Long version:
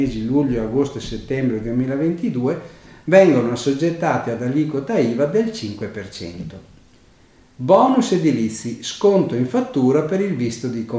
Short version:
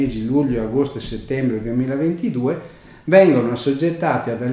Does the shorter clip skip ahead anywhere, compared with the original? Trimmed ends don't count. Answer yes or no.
no